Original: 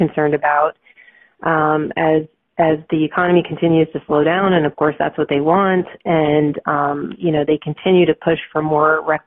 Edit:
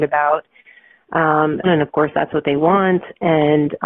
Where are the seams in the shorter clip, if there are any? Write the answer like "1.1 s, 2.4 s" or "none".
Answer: 1.6 s